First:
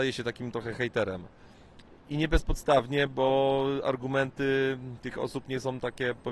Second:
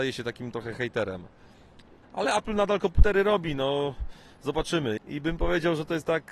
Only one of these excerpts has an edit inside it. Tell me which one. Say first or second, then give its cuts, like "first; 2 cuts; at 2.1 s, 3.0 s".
second; 2 cuts; at 2.0 s, 5.0 s